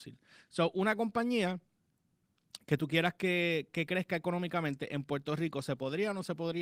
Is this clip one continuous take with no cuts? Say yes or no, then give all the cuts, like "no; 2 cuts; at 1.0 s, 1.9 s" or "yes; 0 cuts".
yes; 0 cuts